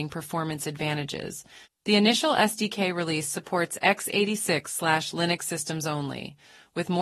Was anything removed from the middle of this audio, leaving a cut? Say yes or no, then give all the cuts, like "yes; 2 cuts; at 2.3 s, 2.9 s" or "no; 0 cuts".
yes; 1 cut; at 1.6 s